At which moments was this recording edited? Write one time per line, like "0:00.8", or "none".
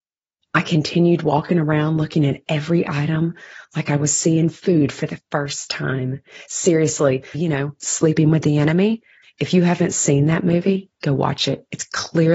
0:07.3
0:09.2